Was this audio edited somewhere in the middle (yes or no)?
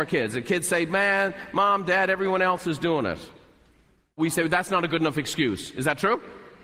no